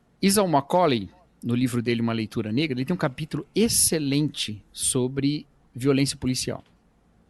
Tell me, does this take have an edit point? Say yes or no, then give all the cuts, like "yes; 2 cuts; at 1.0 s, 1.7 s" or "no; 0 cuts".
no; 0 cuts